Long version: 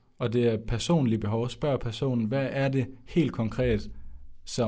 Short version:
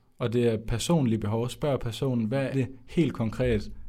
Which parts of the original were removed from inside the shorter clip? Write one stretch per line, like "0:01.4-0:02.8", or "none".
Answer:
0:02.5-0:02.7